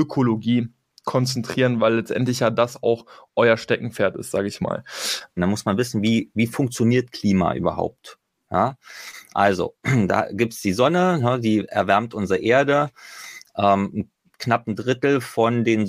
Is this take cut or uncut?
cut